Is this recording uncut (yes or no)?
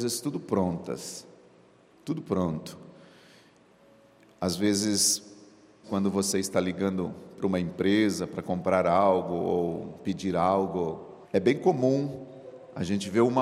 no